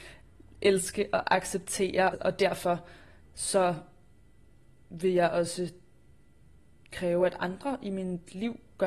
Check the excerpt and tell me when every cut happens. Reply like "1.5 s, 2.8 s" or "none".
none